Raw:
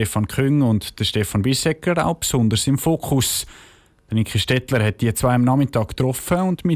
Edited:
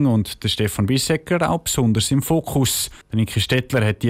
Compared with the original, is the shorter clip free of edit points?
no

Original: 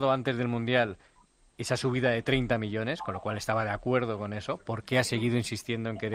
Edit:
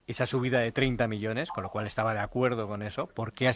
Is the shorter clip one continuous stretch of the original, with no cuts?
yes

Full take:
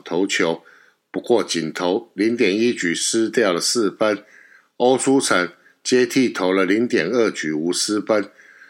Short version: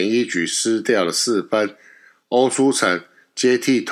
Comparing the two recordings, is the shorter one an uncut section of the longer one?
yes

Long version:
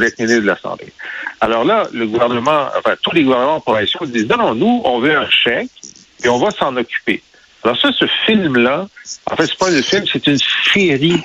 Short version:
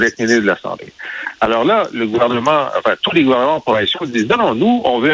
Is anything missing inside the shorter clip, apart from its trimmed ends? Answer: no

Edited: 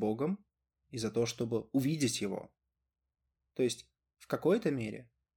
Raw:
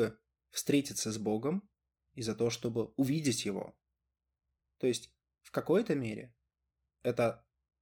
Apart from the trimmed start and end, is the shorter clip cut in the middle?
no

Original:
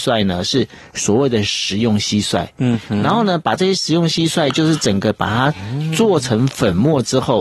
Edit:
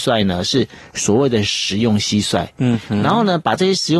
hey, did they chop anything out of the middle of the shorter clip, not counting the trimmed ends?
no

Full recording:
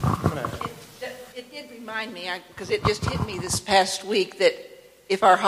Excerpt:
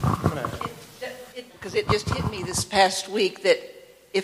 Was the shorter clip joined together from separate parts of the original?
yes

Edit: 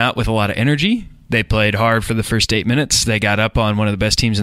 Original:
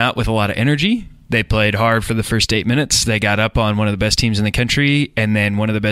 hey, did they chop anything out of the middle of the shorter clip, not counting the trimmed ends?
no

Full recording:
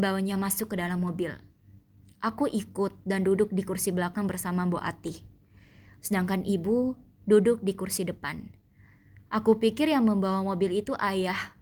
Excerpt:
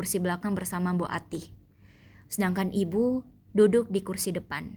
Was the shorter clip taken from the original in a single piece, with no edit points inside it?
yes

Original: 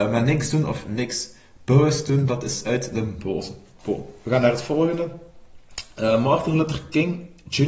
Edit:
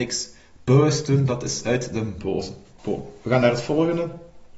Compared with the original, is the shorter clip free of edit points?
yes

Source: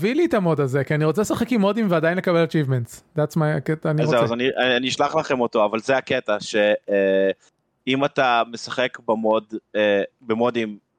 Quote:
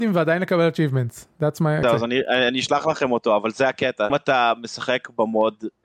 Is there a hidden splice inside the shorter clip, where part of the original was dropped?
yes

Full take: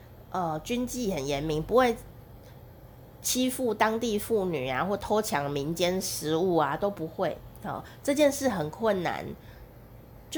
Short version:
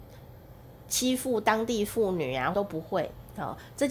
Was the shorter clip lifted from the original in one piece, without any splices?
no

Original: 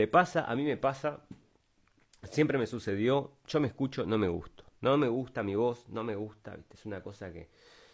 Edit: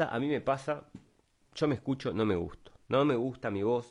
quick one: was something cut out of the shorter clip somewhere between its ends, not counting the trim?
yes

